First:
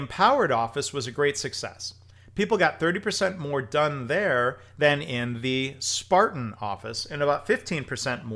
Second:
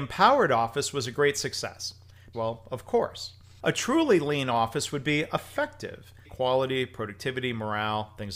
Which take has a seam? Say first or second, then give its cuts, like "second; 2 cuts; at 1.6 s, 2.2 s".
second; 3 cuts; at 2.3 s, 3.6 s, 6.2 s